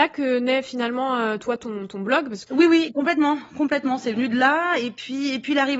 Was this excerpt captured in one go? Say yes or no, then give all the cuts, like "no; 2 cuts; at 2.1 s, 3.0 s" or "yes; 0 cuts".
yes; 0 cuts